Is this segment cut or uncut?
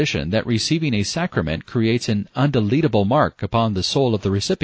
uncut